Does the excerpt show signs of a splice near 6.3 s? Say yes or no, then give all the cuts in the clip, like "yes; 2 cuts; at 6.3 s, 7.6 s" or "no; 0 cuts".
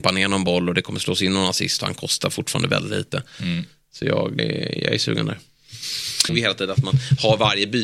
yes; 2 cuts; at 4.4 s, 6.3 s